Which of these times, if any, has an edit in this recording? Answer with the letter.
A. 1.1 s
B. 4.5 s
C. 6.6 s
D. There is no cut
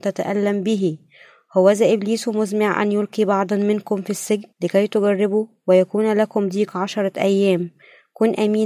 B